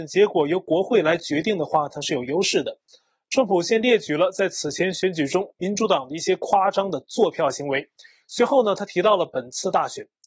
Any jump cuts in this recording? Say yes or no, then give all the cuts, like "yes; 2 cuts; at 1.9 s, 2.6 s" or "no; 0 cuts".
no; 0 cuts